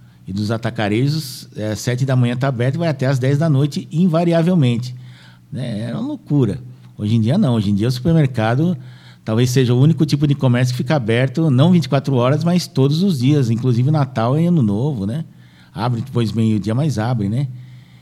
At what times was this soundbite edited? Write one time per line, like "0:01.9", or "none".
0:05.4